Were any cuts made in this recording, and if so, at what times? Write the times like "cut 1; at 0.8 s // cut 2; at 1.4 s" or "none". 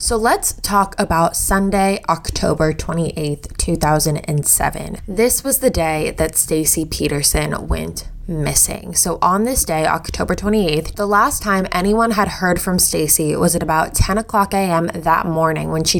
cut 1; at 10.9 s